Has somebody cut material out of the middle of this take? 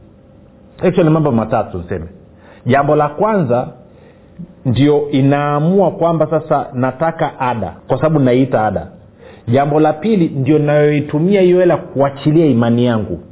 yes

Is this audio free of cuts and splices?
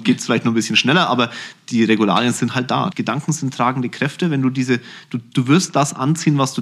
no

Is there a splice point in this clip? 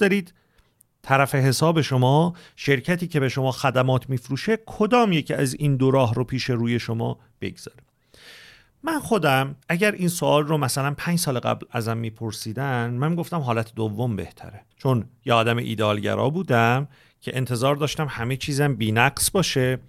yes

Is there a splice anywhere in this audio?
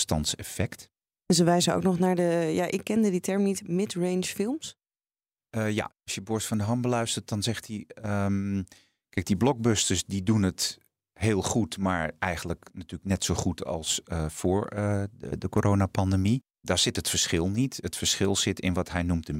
yes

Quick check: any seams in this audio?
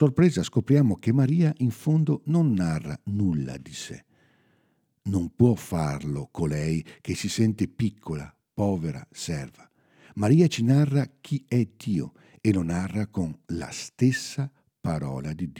no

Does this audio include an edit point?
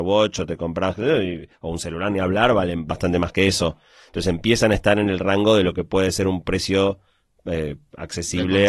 no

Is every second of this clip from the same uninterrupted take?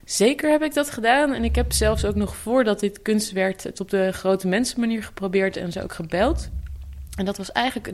yes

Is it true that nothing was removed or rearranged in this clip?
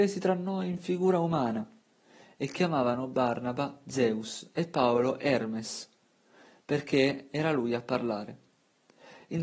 yes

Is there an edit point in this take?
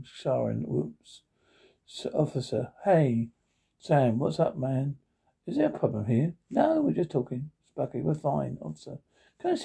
no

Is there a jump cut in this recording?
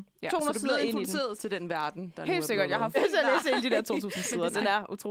yes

